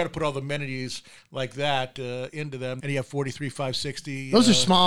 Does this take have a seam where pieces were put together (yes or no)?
yes